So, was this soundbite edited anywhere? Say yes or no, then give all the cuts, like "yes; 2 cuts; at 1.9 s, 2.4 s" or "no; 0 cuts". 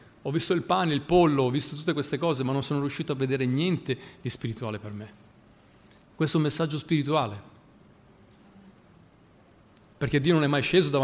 no; 0 cuts